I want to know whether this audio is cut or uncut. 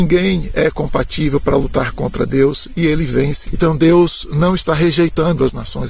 cut